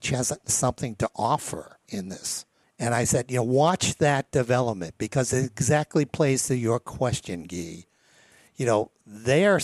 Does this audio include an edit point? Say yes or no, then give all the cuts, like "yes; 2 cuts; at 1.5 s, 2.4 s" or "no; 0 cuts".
yes; 1 cut; at 2.6 s